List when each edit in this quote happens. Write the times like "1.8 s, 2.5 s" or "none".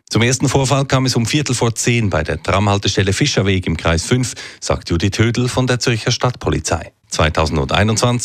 7.0 s